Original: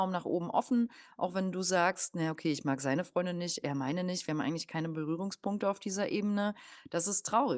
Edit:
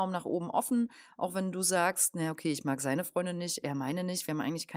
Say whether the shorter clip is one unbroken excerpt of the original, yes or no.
yes